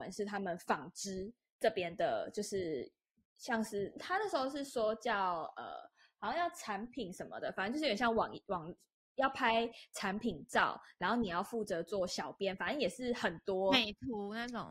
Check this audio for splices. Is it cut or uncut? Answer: uncut